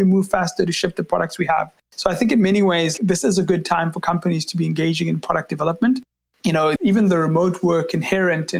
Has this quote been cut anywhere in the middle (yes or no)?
yes